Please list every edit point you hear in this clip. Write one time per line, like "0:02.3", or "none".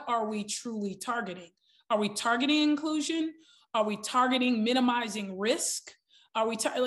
none